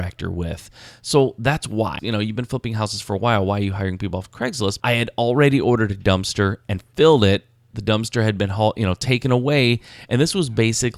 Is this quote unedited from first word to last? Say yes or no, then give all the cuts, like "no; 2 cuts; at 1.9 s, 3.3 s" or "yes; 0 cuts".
no; 2 cuts; at 2.0 s, 4.8 s